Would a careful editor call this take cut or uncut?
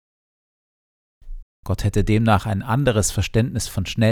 cut